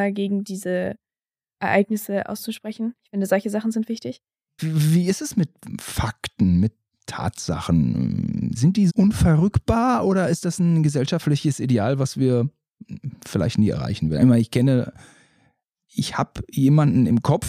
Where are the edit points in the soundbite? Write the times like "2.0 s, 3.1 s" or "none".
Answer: 4.6 s, 8.9 s